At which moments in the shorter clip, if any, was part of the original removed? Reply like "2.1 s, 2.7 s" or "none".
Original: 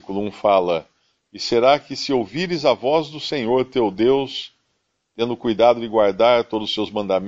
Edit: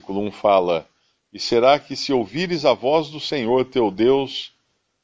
none